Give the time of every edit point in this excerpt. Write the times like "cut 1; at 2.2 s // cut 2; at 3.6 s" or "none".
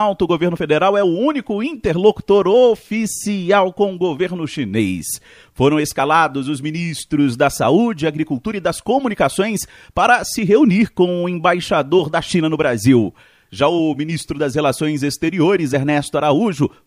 none